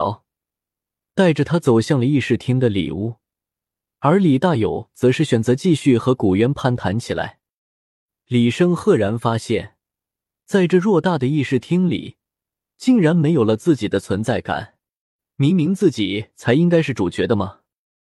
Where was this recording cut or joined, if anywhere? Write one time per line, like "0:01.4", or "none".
none